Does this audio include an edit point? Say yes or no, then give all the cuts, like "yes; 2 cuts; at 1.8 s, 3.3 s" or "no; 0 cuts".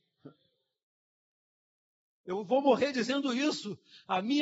no; 0 cuts